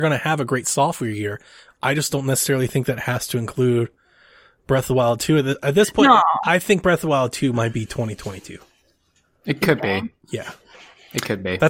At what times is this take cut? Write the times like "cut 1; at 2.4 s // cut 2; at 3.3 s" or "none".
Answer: none

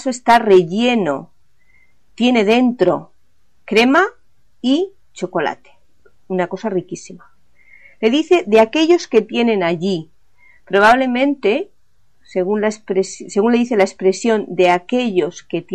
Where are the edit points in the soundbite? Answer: none

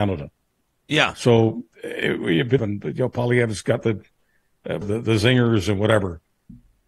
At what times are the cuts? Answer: cut 1; at 2.6 s // cut 2; at 4.8 s

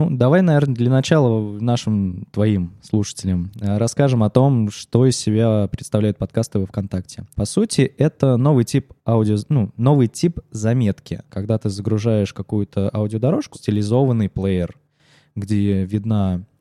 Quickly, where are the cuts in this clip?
cut 1; at 7.3 s // cut 2; at 11.3 s // cut 3; at 13.5 s

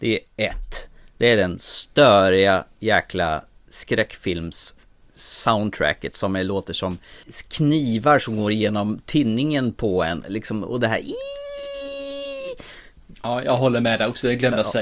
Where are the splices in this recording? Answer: none

